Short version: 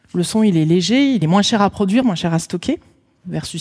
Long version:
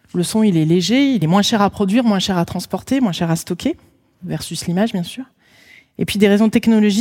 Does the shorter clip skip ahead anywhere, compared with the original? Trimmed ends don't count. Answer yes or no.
yes